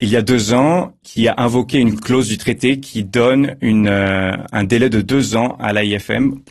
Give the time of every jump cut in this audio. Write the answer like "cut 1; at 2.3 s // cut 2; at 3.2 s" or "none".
cut 1; at 1.0 s